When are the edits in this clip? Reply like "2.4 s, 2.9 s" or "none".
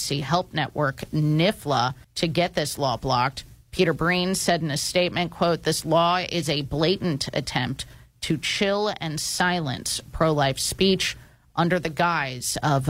2.0 s